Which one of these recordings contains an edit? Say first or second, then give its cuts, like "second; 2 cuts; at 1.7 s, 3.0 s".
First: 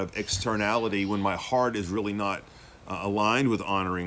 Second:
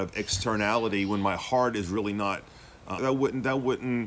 second; 1 cut; at 3.0 s